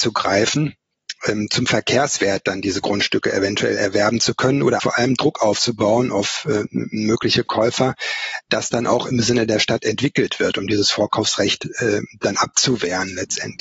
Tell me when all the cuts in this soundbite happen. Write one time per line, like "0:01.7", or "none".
0:04.8